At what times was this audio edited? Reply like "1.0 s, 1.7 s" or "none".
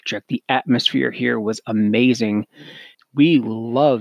2.9 s

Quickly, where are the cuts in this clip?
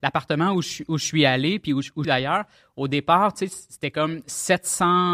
2.0 s

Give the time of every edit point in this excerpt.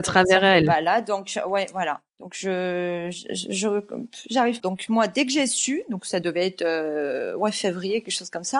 2.1 s, 4.6 s

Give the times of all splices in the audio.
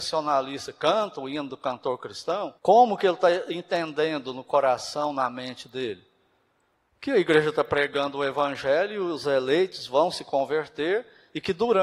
2.6 s

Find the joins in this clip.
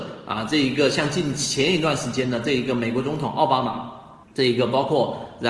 4.2 s

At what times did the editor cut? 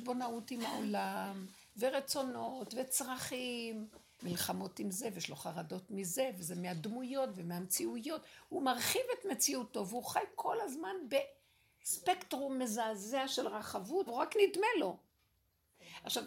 4.2 s, 14.1 s

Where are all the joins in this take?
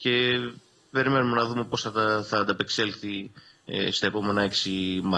none

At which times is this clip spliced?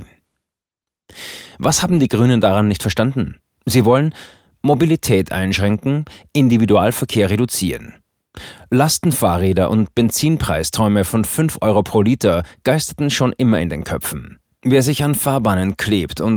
none

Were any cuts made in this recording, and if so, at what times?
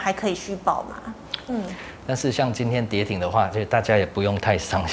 1.5 s

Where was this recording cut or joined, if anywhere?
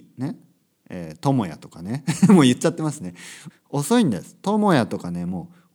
3.5 s

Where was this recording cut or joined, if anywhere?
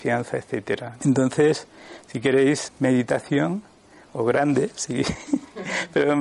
1.0 s, 2.7 s

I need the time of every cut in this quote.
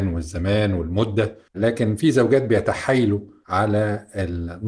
1.5 s

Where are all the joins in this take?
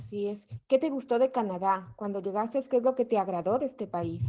2.7 s

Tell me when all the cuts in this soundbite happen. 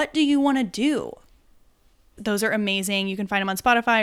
2.2 s

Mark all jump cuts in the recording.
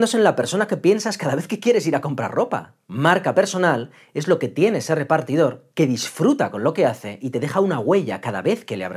none

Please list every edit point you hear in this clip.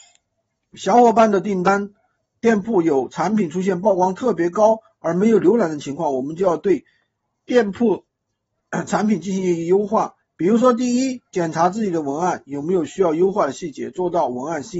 none

